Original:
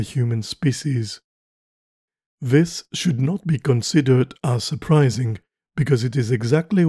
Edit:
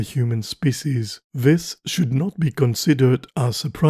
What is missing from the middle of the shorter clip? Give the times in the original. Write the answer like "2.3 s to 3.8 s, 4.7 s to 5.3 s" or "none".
1.2 s to 2.3 s